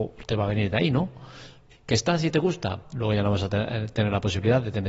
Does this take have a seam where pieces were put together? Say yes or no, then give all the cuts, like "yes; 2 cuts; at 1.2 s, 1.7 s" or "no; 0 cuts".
yes; 2 cuts; at 1.7 s, 2.8 s